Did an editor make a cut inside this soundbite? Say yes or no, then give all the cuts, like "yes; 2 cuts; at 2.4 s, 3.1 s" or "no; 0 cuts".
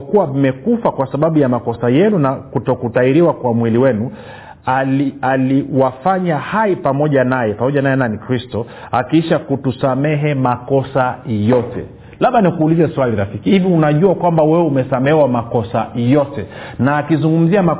no; 0 cuts